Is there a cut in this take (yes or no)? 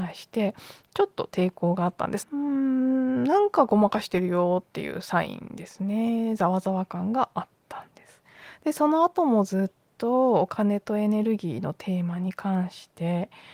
yes